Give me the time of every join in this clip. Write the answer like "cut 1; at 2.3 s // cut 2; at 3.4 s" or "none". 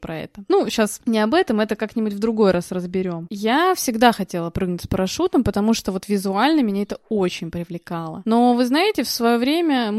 none

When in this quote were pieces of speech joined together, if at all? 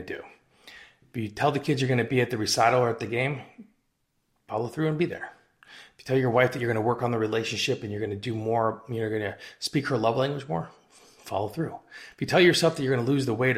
none

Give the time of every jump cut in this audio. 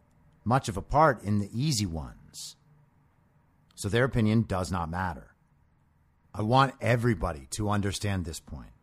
cut 1; at 3.7 s // cut 2; at 6.2 s

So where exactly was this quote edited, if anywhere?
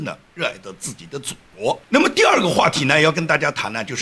cut 1; at 1.8 s

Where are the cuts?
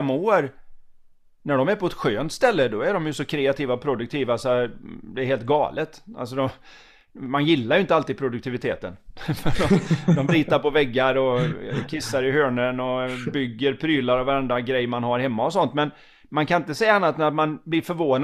none

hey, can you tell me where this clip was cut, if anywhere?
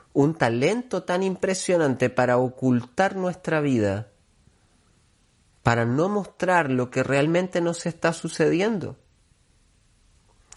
none

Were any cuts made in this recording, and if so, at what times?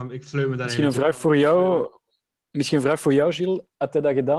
none

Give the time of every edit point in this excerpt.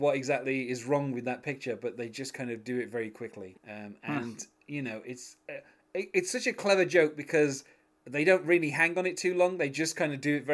cut 1; at 3.5 s

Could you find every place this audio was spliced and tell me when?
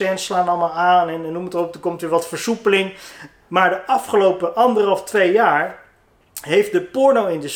none

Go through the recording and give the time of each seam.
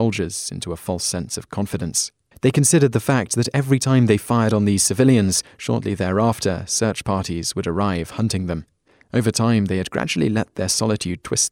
none

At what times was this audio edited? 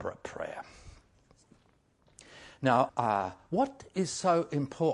cut 1; at 2.9 s

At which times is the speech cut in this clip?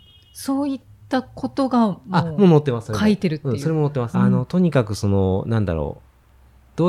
cut 1; at 4.1 s

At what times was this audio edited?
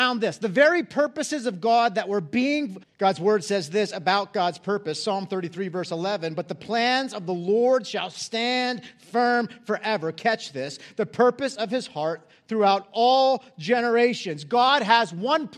cut 1; at 2.8 s

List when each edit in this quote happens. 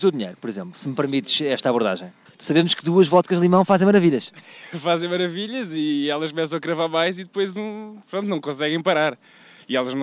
cut 1; at 2.3 s

